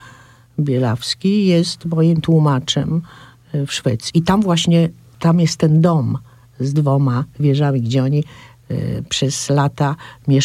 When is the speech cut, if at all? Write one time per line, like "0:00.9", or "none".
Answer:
0:04.1